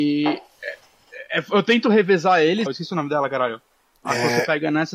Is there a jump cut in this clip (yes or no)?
yes